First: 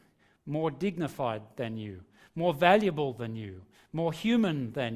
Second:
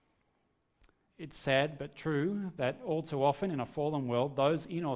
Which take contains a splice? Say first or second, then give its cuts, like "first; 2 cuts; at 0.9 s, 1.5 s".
second; 1 cut; at 1.1 s